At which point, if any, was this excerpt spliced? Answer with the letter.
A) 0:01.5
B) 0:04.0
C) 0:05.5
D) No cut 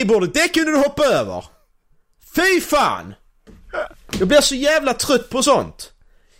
D